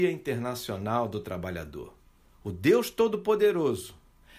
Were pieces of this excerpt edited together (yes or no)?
yes